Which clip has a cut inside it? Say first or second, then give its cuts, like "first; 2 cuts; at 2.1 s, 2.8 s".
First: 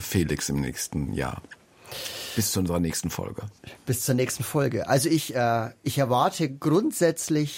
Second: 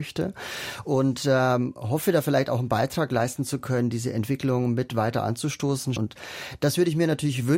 second; 1 cut; at 6.0 s